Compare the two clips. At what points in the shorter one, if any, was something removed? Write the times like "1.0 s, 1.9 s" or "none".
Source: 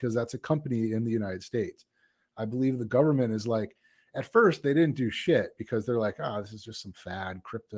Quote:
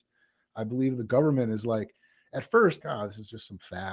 2.8 s

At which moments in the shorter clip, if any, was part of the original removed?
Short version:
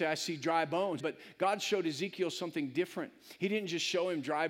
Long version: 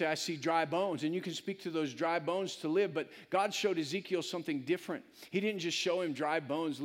1.0 s

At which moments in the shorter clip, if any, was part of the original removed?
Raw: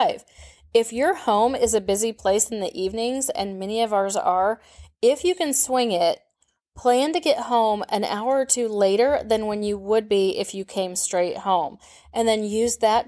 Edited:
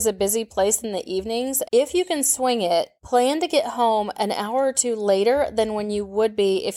1.6 s, 3.0 s

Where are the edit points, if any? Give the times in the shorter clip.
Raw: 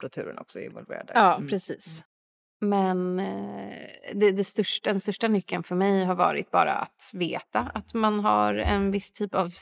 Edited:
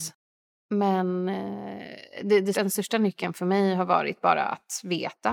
2.5 s

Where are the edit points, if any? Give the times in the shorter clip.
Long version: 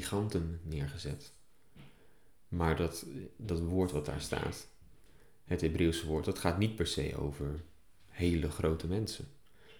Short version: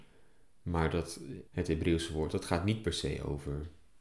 1.5 s

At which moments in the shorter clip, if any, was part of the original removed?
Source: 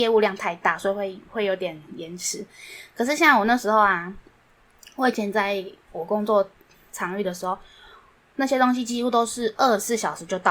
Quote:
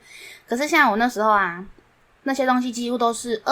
2.2 s

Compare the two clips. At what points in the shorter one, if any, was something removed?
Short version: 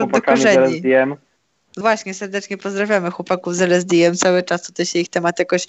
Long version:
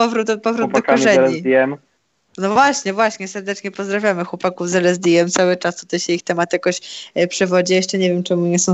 1.8 s

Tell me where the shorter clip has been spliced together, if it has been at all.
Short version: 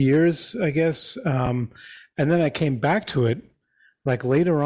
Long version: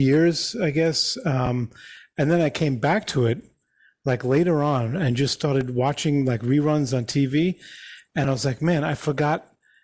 none

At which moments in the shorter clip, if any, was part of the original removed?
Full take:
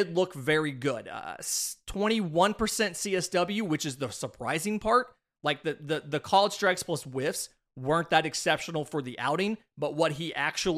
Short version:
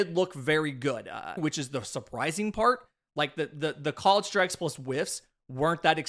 1.4 s

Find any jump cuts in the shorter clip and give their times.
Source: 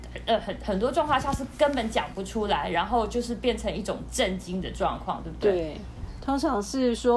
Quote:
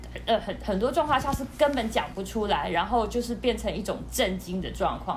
none

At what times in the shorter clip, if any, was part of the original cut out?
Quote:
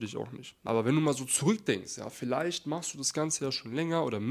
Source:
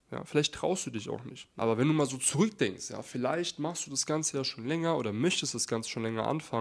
none

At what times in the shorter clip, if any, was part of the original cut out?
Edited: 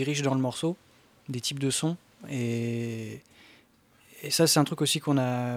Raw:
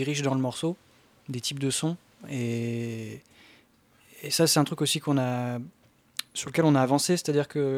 none

